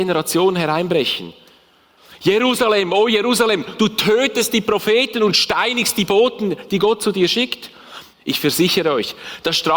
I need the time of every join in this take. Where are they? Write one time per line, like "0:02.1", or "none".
0:08.1